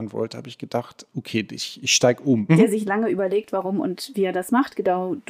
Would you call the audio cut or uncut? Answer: cut